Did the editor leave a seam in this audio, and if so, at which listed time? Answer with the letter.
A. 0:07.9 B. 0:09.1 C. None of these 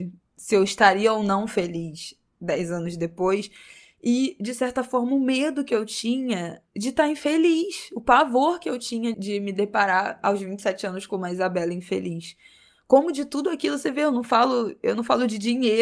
B